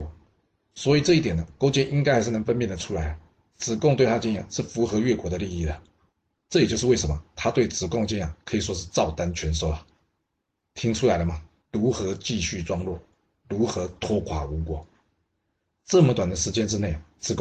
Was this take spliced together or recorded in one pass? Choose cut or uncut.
cut